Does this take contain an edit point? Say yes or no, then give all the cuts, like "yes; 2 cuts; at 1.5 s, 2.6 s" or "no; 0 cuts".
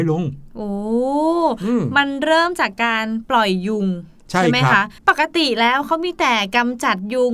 yes; 1 cut; at 5.0 s